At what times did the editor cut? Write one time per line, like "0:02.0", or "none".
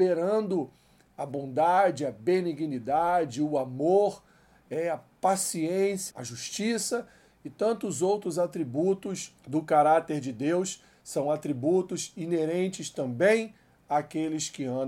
0:06.1
0:09.4